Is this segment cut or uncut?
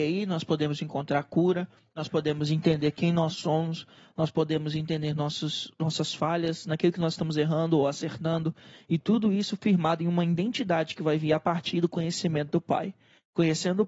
uncut